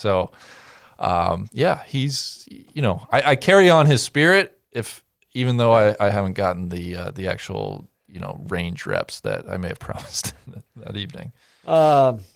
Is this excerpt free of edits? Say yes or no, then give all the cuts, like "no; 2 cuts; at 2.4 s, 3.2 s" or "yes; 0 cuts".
yes; 0 cuts